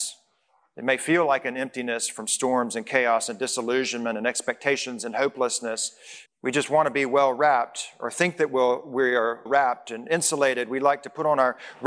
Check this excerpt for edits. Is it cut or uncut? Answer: cut